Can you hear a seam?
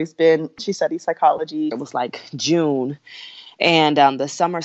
yes; 1 cut; at 1.7 s

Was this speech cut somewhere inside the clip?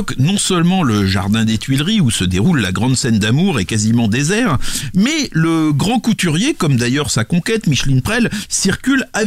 no; 0 cuts

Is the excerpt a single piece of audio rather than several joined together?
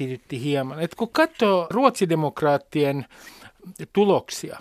no; 1 cut; at 1.7 s

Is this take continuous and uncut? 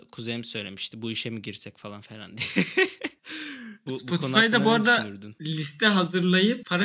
yes; 0 cuts

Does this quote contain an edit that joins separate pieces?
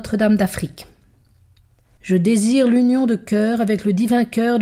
yes; 1 cut; at 2.0 s

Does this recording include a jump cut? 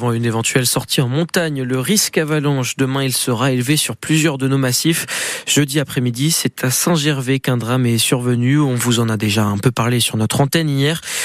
no; 0 cuts

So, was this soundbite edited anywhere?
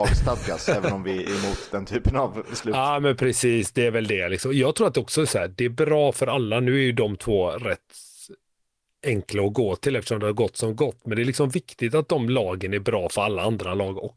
no; 0 cuts

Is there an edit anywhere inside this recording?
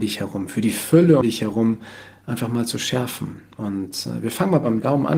yes; 1 cut; at 1.2 s

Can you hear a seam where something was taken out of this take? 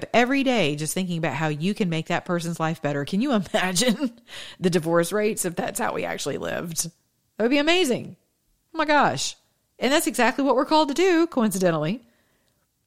no; 0 cuts

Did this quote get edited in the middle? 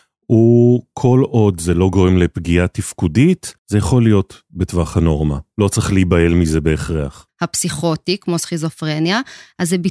yes; 2 cuts; at 3.6 s, 7.3 s

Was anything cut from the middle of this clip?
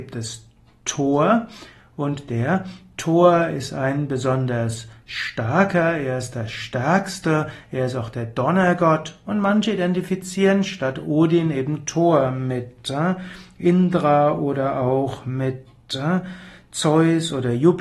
no; 0 cuts

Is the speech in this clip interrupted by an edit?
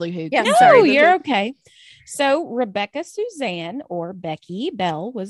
no; 0 cuts

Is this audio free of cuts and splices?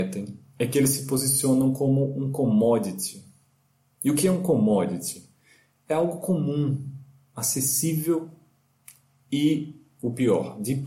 yes; 0 cuts

